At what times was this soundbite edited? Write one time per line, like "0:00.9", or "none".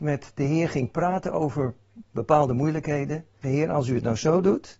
0:03.4